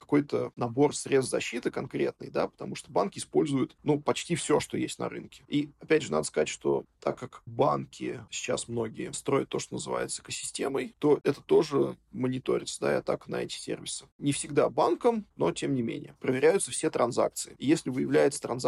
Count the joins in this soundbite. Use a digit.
1